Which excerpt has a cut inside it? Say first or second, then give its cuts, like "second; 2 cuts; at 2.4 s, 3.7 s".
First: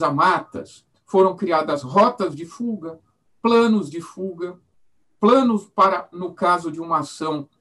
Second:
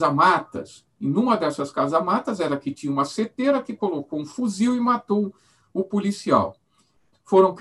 first; 1 cut; at 0.9 s